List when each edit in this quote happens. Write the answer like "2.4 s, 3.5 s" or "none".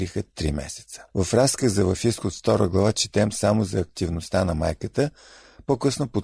1.1 s